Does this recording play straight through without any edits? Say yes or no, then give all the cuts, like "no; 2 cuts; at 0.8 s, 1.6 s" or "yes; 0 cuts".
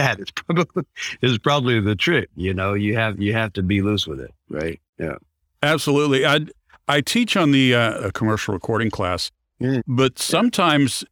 no; 2 cuts; at 8.0 s, 9.8 s